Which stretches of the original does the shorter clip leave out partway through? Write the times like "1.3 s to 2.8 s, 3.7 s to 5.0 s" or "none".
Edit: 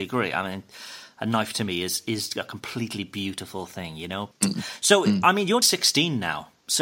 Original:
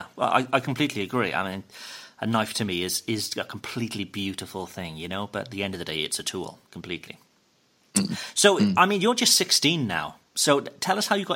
5.3 s to 7.8 s, 9.2 s to 9.3 s